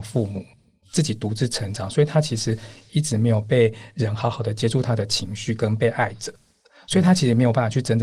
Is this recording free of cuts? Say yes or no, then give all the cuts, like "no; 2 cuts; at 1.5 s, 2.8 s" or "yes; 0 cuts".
yes; 0 cuts